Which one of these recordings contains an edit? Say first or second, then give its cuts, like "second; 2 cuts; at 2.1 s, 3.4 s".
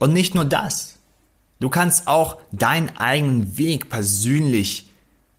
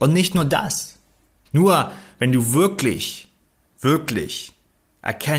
second; 1 cut; at 1.5 s